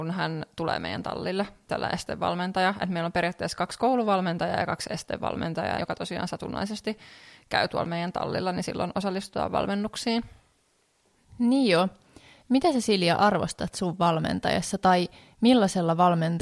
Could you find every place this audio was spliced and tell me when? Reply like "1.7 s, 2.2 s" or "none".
5.8 s